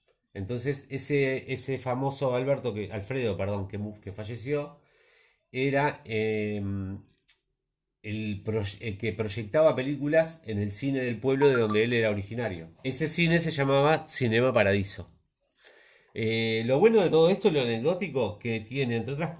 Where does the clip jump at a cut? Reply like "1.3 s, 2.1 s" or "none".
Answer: 12.7 s